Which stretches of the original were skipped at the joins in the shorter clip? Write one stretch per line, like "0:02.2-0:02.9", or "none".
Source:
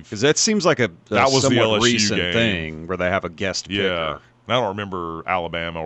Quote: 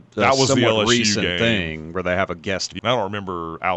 0:03.7-0:04.4